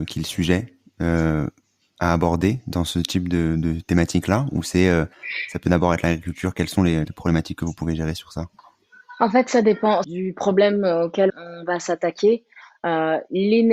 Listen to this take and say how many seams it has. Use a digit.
3